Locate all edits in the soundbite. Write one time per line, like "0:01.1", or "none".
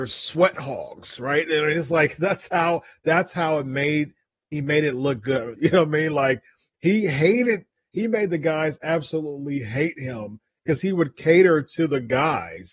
0:05.6

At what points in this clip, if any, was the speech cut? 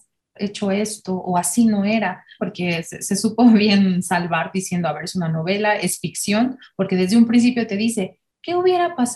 0:02.4

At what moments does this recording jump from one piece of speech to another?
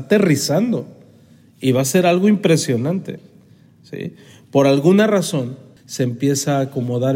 0:05.8

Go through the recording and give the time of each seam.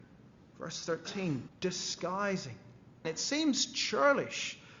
0:01.5
0:03.0

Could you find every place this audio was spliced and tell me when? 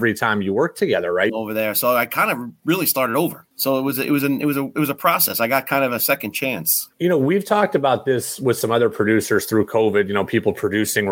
0:01.3
0:03.5
0:06.9

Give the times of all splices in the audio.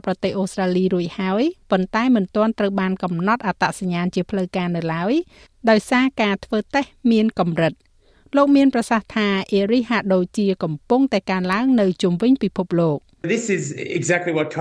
0:13.2

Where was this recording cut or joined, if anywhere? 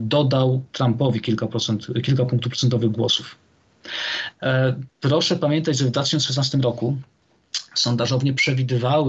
0:04.3

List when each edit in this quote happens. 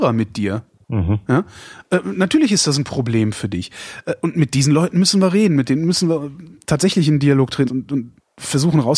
0:07.7

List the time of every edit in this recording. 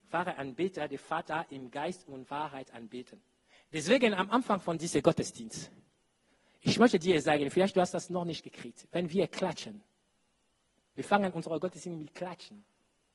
0:03.7

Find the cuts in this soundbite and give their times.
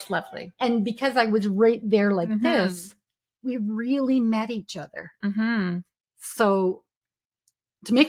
none

